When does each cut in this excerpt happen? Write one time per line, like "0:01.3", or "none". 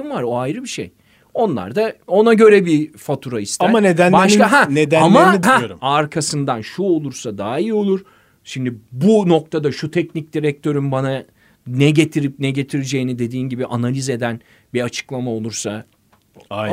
0:05.4